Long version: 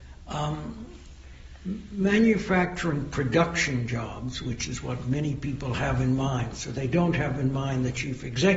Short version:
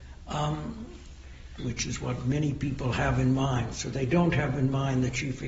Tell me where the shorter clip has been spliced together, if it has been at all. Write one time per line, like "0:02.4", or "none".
0:01.6